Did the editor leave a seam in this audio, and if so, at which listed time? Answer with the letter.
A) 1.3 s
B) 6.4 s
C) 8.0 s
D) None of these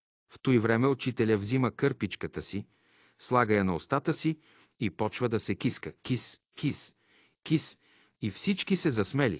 B